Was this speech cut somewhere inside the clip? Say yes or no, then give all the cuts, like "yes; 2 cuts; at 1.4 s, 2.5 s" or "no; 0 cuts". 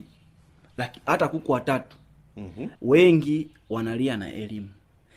yes; 1 cut; at 2.8 s